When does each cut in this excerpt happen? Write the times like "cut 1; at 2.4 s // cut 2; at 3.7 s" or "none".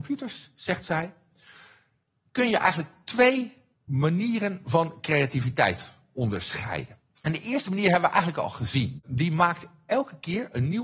cut 1; at 9.0 s